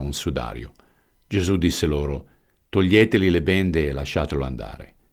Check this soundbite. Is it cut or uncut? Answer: uncut